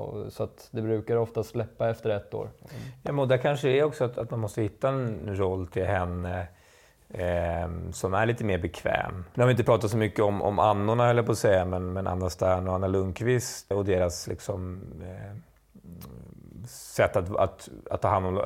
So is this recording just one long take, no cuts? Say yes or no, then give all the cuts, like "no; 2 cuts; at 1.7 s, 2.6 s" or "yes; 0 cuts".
no; 2 cuts; at 9.3 s, 13.7 s